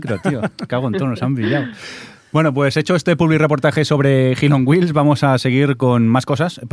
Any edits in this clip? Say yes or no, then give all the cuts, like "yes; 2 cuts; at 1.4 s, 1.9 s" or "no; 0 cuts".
no; 0 cuts